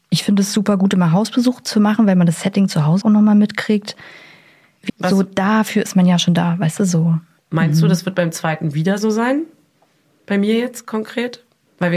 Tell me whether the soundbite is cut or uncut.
cut